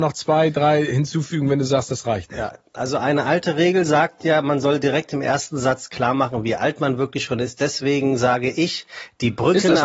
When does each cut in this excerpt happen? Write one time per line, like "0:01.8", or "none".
none